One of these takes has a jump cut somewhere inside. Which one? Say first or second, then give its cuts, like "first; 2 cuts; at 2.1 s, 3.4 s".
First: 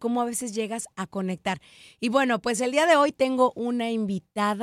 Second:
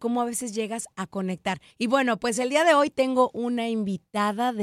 second; 1 cut; at 1.7 s